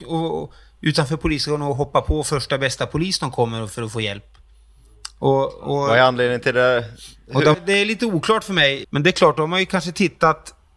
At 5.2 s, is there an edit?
no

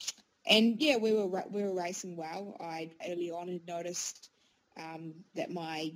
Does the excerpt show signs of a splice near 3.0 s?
yes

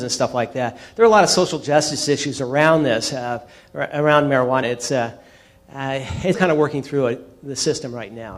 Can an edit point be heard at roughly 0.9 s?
no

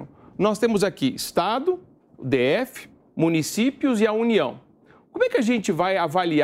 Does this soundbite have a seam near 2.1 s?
yes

